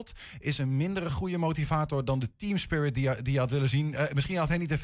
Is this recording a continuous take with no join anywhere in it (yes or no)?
yes